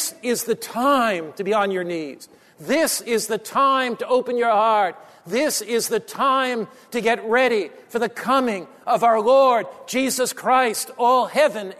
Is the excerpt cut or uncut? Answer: uncut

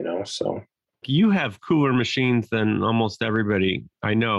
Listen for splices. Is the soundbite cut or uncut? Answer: cut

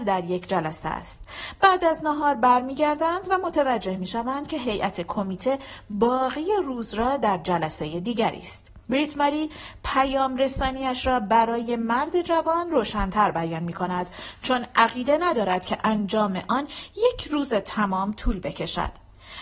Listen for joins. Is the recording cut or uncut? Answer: cut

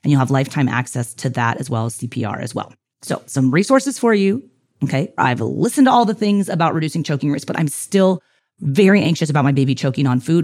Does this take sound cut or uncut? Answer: cut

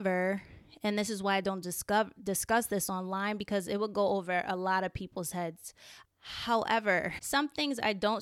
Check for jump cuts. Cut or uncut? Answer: cut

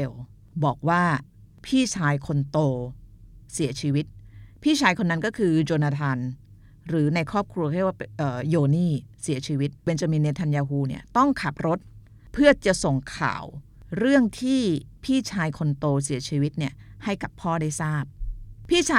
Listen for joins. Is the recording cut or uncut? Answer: cut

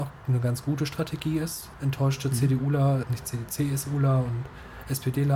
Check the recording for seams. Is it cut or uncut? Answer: cut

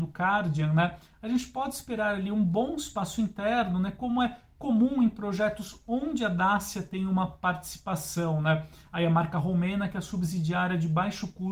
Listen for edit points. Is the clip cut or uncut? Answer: uncut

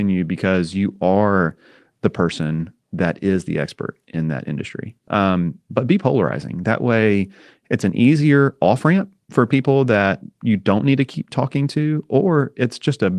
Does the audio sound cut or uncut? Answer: cut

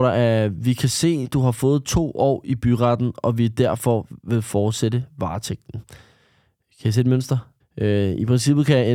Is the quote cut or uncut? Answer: cut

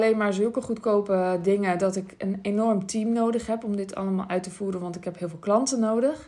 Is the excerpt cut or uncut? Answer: uncut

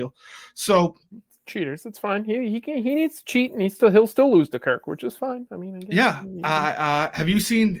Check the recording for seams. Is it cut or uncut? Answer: uncut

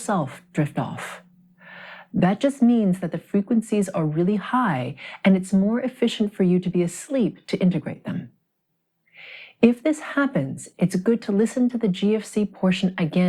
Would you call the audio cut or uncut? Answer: uncut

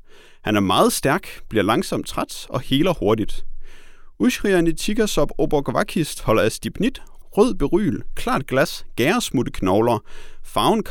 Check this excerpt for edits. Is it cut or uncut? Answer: cut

